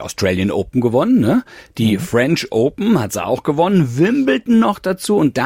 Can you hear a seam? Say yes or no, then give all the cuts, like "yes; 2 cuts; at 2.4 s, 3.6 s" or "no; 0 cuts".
no; 0 cuts